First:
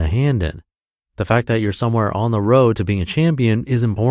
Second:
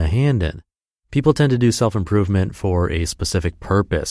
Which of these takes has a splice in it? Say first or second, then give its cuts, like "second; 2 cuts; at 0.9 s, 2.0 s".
second; 1 cut; at 1.0 s